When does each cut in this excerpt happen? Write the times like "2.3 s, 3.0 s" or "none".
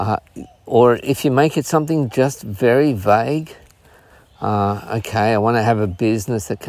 none